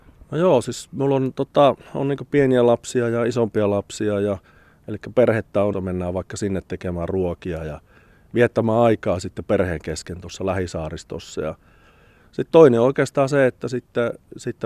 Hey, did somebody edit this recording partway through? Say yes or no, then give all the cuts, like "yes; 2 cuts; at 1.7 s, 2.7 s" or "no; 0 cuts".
yes; 1 cut; at 5.7 s